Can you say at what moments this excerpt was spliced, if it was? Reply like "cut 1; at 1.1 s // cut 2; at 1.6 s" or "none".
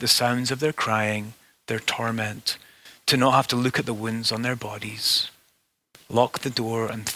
none